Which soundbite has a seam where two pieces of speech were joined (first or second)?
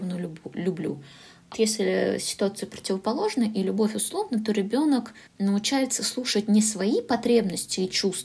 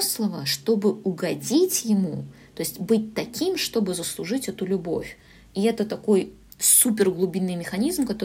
first